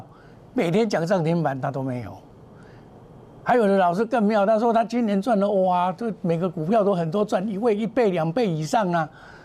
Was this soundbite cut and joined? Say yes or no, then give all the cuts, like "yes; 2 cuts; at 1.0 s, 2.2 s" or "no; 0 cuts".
no; 0 cuts